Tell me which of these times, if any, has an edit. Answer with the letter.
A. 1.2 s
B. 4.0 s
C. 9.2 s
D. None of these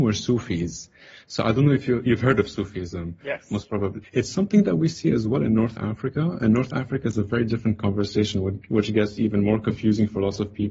B